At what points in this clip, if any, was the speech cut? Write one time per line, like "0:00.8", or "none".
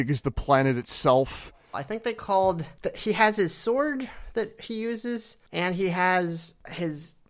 0:01.7